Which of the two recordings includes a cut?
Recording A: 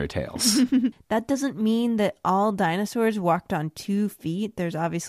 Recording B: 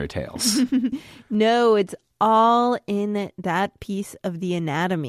A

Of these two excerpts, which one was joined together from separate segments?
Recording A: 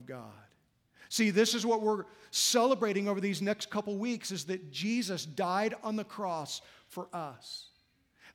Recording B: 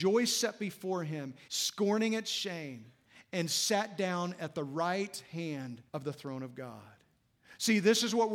B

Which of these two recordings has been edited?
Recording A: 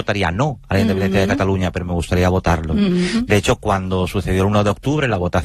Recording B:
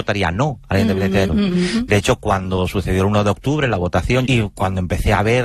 B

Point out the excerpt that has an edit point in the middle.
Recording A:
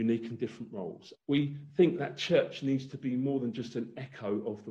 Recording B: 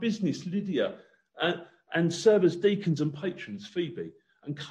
A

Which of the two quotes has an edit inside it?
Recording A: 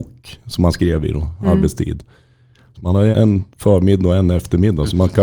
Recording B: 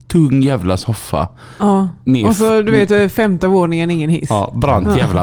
A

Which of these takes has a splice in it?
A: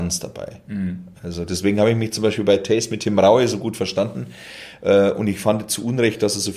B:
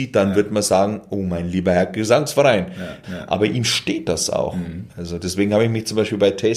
B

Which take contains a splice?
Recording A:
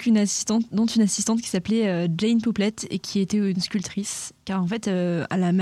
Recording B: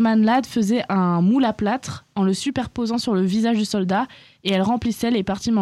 A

